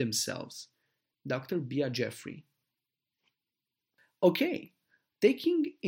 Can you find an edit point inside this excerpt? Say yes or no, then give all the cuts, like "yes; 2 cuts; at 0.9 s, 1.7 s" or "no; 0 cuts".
yes; 1 cut; at 1.1 s